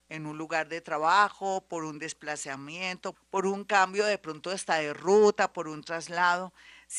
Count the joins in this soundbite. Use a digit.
2